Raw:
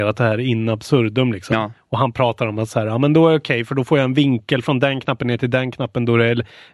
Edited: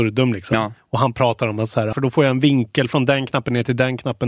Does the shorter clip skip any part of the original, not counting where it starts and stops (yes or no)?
yes